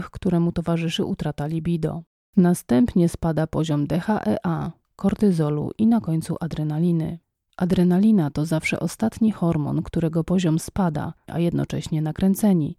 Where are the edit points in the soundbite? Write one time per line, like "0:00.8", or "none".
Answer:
0:07.5
0:11.3